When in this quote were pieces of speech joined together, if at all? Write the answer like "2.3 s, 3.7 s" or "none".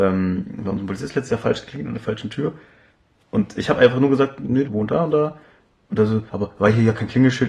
4.6 s, 6.3 s